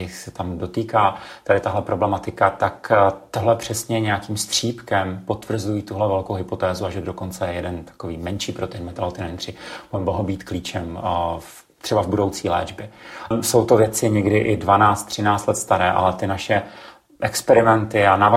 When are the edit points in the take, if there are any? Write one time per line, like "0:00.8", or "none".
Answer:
0:13.3